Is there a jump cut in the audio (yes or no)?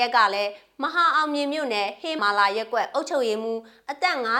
yes